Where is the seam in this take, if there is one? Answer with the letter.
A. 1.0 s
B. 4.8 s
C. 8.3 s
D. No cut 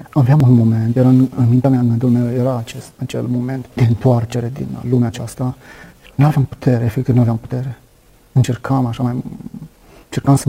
B